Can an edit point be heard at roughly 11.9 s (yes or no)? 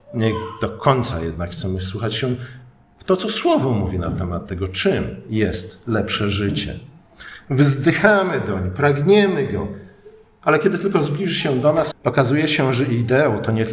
yes